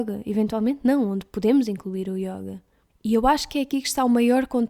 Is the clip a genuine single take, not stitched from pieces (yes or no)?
yes